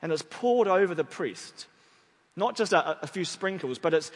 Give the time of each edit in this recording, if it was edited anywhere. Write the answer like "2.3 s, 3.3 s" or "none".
none

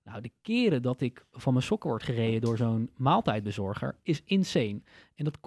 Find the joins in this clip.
none

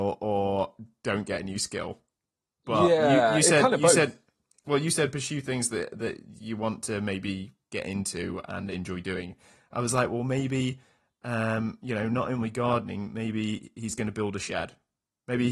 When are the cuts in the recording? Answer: none

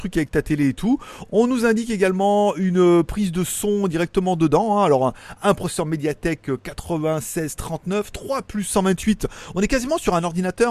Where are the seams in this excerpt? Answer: none

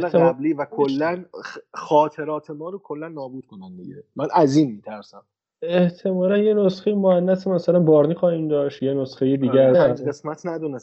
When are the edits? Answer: 9.7 s

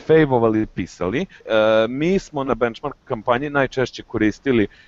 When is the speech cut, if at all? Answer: 1.4 s, 2.5 s

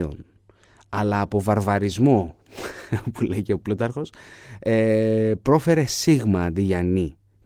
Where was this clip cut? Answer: none

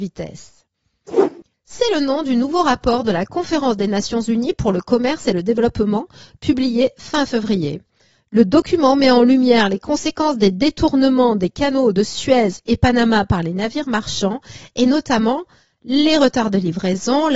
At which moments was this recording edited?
1.5 s

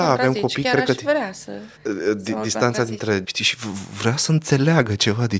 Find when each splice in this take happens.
1.8 s, 3.2 s

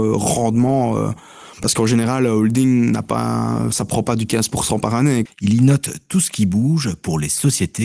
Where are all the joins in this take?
5.3 s

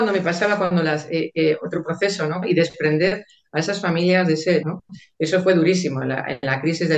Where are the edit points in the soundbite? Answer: 2.4 s, 4.6 s

